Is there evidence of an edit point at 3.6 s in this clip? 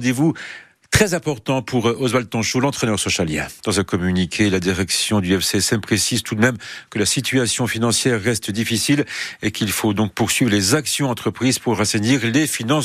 yes; 1 cut; at 3.6 s

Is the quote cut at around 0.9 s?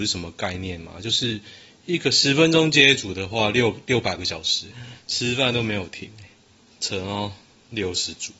no; 1 cut; at 4.7 s

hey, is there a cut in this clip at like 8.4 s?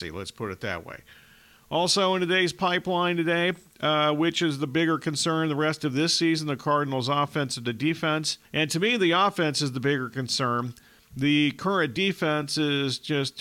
yes; 2 cuts; at 8.4 s, 11.0 s

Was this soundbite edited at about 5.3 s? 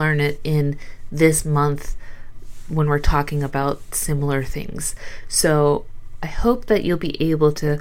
no; 0 cuts

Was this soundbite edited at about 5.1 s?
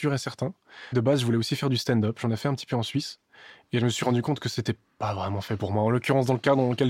no; 1 cut; at 0.9 s

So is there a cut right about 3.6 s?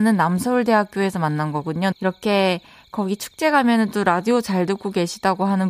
no; 1 cut; at 1.9 s

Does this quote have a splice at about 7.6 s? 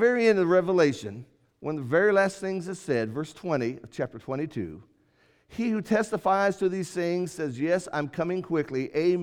no; 0 cuts

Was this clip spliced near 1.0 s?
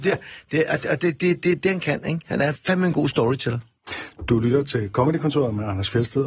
no; 0 cuts

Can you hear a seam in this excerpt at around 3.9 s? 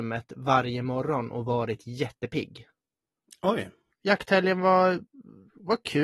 yes; 1 cut; at 3.9 s

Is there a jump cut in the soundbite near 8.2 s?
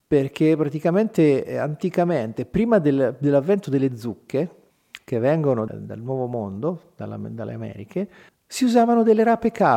no; 1 cut; at 5.7 s

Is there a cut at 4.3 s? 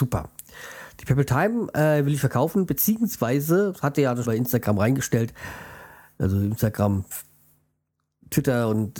yes; 1 cut; at 4.3 s

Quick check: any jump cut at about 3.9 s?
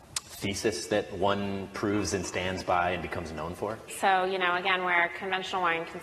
yes; 1 cut; at 3.9 s

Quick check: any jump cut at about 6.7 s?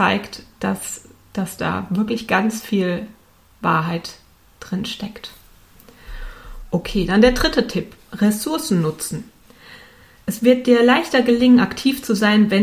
no; 0 cuts

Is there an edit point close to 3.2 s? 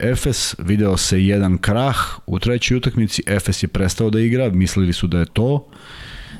no; 1 cut; at 5.3 s

